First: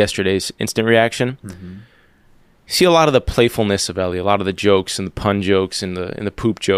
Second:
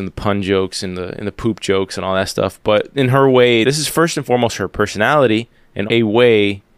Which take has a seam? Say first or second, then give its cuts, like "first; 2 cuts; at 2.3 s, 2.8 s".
second; 2 cuts; at 3.6 s, 5.9 s